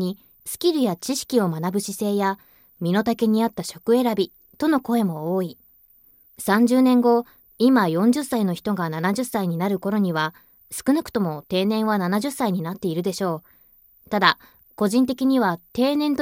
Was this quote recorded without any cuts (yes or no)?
no